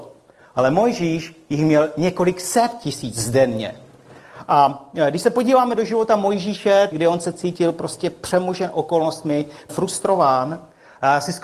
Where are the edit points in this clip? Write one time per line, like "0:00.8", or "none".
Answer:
0:06.9
0:09.7